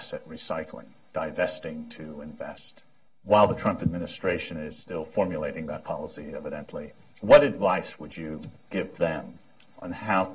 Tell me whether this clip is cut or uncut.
cut